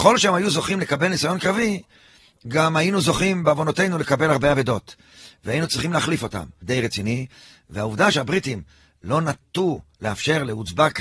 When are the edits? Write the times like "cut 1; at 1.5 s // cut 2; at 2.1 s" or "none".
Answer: cut 1; at 6.6 s